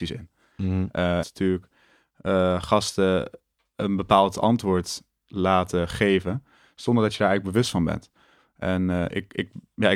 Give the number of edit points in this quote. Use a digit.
1